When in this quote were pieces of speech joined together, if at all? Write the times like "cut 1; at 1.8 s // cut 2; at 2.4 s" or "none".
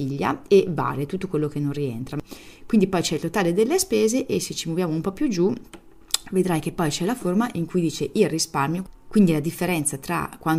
none